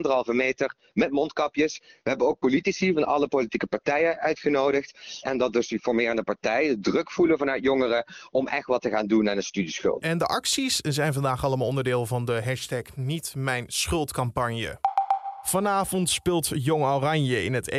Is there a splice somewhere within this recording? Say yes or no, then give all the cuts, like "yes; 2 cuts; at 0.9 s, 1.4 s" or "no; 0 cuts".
yes; 2 cuts; at 5.2 s, 10.0 s